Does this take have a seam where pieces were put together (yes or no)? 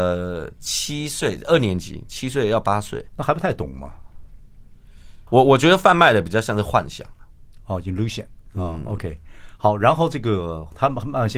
yes